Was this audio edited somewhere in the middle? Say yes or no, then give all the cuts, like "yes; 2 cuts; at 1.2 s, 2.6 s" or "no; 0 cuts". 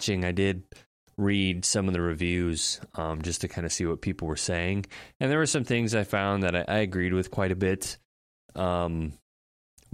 no; 0 cuts